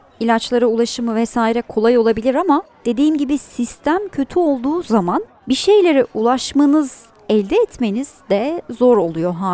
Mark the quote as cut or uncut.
uncut